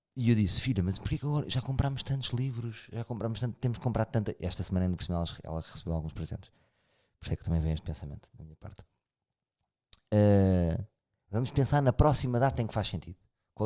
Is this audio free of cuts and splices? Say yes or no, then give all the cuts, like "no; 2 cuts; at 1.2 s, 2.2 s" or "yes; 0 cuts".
yes; 0 cuts